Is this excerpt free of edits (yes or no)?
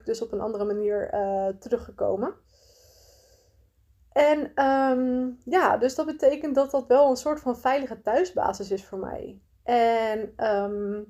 yes